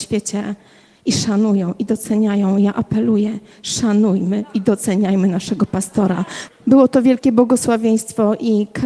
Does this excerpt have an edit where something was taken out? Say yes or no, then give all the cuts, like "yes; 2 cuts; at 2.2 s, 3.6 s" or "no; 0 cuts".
yes; 1 cut; at 6.5 s